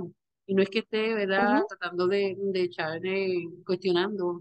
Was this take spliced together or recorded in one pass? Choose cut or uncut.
uncut